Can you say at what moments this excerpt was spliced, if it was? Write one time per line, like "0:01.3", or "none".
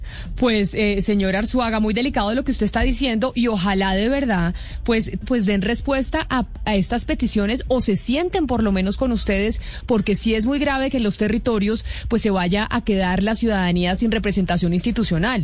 0:05.2